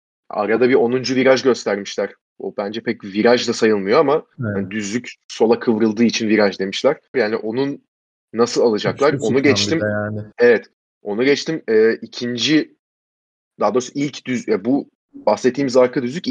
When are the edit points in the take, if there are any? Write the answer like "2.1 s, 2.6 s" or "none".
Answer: 7.1 s, 10.3 s